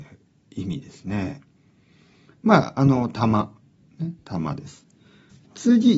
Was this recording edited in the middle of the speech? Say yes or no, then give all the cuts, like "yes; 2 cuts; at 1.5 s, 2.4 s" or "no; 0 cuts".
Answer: no; 0 cuts